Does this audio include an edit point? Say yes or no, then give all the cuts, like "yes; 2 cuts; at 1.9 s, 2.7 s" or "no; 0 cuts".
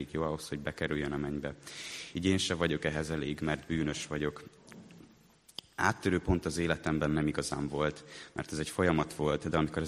no; 0 cuts